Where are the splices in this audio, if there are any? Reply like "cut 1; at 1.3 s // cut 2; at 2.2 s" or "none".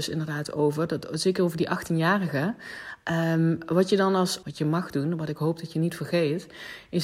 cut 1; at 4.4 s

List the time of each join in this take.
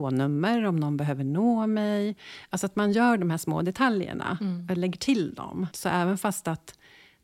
cut 1; at 5.7 s

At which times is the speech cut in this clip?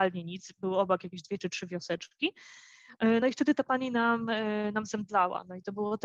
none

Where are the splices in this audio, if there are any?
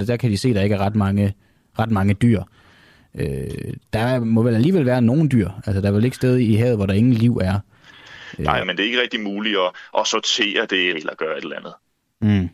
cut 1; at 8.6 s // cut 2; at 10.9 s

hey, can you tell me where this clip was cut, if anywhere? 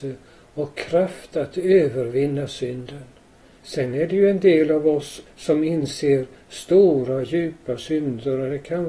cut 1; at 3.6 s

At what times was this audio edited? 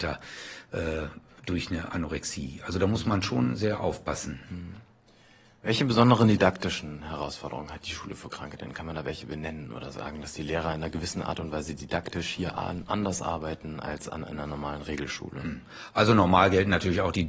none

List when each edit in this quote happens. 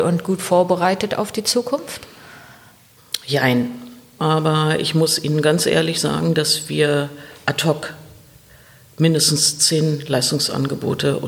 cut 1; at 4.2 s

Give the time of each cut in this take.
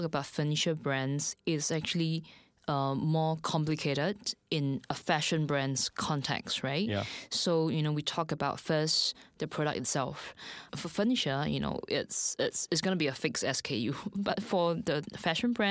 none

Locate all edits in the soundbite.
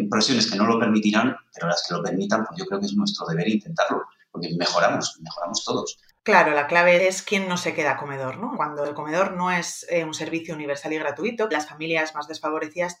cut 1; at 6.1 s

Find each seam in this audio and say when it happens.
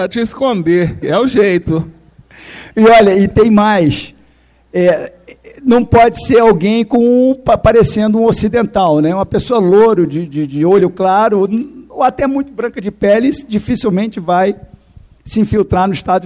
none

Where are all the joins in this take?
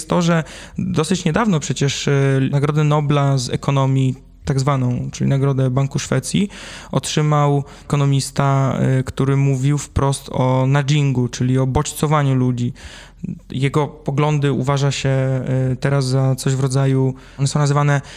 none

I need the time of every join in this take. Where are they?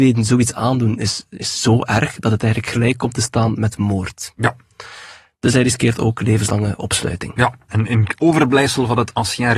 cut 1; at 7.7 s

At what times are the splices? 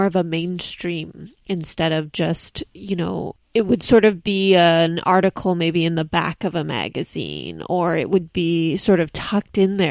none

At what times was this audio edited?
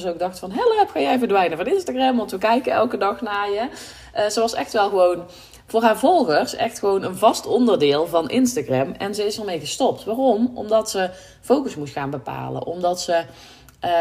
none

